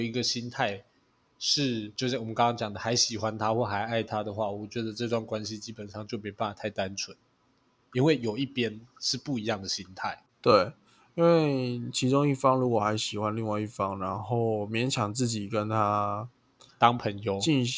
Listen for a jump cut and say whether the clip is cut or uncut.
cut